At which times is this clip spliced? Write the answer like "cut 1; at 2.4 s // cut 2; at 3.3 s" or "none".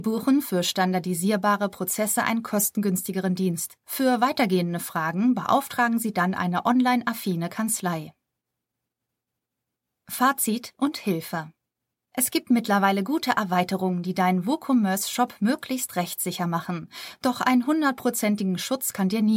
none